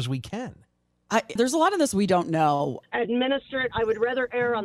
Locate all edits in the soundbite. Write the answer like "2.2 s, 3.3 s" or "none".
1.4 s, 2.8 s